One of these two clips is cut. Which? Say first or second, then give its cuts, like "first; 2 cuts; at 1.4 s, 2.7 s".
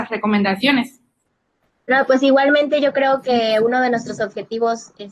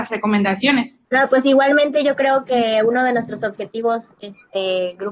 second; 1 cut; at 1.0 s